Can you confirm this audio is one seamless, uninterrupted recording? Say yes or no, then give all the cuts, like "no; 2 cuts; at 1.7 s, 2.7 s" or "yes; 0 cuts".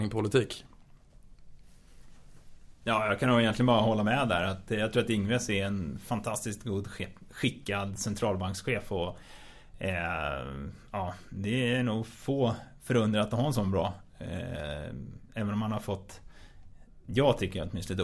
yes; 0 cuts